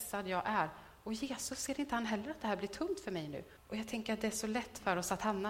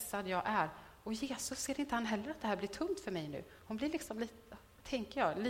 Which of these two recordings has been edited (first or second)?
first